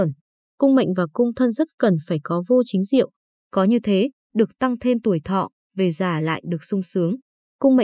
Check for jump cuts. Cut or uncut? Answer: cut